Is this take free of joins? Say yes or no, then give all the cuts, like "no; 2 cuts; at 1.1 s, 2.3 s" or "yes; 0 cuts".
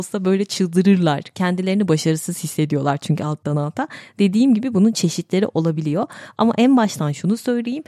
yes; 0 cuts